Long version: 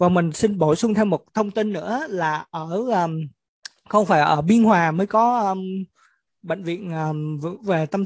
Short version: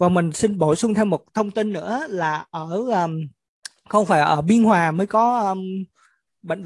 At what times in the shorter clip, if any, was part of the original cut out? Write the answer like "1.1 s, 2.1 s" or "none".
none